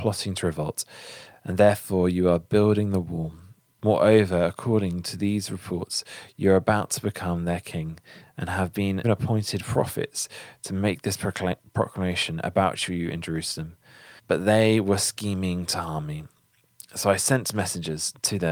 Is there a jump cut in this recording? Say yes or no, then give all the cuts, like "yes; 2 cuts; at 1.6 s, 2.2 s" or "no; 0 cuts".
yes; 2 cuts; at 9.0 s, 14.2 s